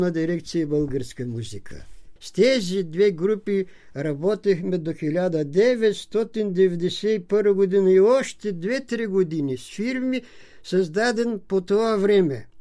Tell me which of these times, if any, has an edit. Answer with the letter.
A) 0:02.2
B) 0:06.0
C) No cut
A